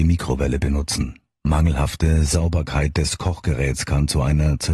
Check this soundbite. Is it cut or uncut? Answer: cut